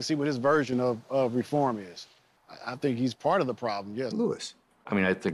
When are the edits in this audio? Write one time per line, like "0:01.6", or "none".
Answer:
0:02.4
0:04.1